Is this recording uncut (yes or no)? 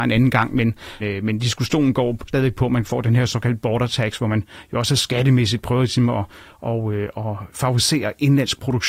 no